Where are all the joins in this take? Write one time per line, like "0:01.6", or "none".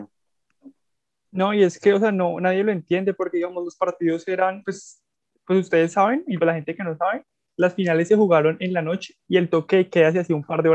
0:06.4
0:09.2